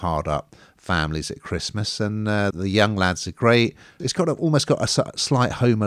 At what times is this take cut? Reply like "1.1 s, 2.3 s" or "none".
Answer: 2.5 s, 4.0 s